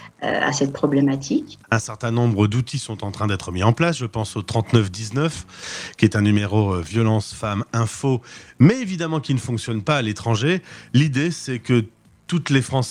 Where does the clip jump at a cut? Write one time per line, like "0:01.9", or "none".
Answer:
0:01.6